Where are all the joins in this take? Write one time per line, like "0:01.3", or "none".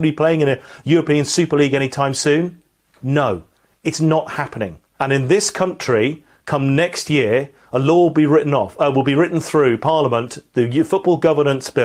0:05.0